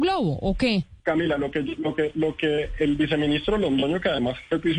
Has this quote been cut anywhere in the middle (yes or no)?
yes